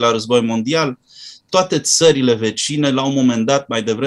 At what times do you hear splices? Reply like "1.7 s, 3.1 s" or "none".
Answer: 1.4 s